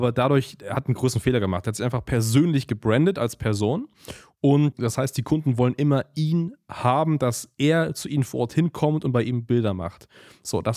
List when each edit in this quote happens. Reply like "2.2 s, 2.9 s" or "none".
none